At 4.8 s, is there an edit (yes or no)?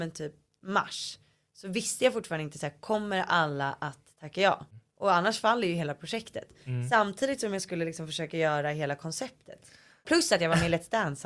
no